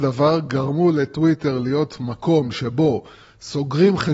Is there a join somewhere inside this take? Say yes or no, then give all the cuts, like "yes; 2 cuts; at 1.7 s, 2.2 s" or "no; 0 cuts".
no; 0 cuts